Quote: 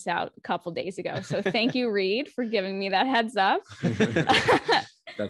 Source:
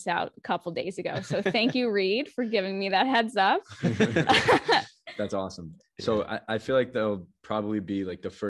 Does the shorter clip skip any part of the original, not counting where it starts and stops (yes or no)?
no